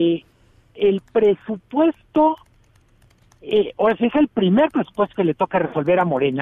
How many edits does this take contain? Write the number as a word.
zero